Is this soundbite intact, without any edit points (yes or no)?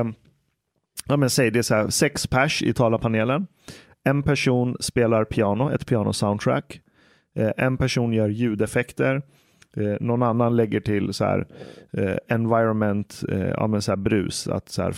yes